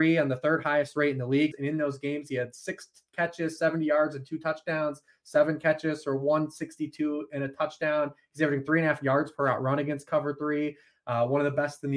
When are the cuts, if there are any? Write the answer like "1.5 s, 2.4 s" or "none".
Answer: 1.5 s